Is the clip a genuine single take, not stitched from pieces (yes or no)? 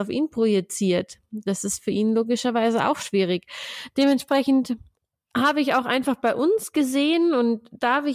yes